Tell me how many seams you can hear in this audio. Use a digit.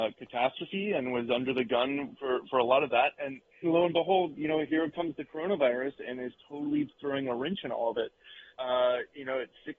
2